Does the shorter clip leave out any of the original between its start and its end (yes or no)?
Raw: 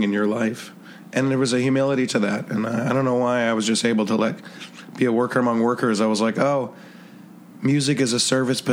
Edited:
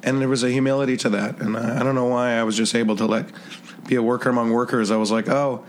no